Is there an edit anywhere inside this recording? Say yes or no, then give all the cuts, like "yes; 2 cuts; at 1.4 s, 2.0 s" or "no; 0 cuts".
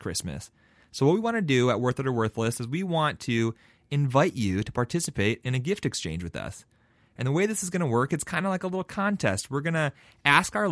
no; 0 cuts